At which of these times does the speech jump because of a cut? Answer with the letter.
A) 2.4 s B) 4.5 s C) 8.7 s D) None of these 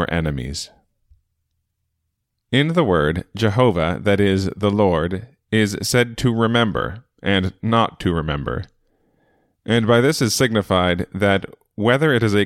A